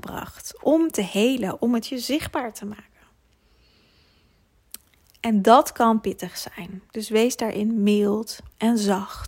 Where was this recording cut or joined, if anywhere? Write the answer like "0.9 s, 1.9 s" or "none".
6.9 s